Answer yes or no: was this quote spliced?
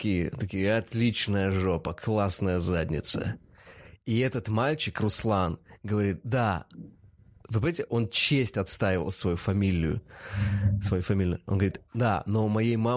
no